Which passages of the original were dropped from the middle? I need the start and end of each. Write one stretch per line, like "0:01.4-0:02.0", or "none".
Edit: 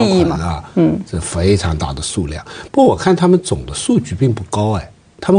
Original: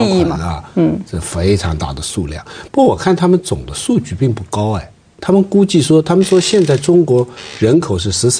none